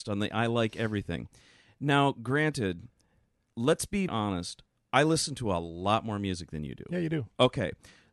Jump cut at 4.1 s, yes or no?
yes